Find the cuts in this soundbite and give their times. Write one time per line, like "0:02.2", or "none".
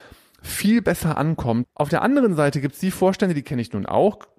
0:01.6